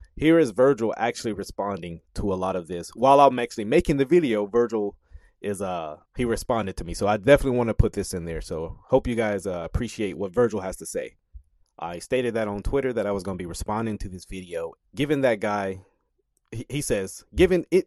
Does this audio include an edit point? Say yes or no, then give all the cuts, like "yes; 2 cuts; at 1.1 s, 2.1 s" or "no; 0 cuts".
yes; 3 cuts; at 6.1 s, 11.6 s, 14.8 s